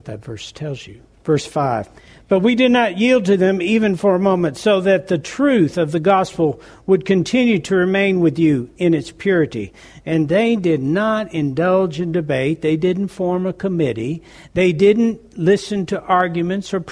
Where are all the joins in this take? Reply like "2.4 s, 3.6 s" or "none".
none